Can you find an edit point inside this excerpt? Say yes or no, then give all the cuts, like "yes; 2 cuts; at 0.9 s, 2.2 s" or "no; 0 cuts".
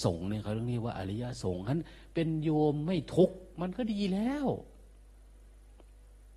no; 0 cuts